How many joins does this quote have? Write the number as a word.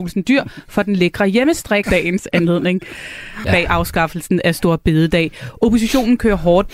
two